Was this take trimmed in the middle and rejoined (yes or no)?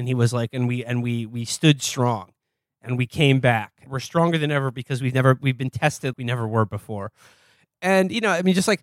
yes